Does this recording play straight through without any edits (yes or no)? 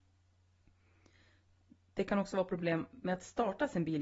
yes